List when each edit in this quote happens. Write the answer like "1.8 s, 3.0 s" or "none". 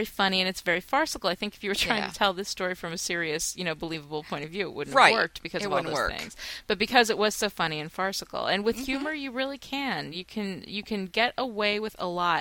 none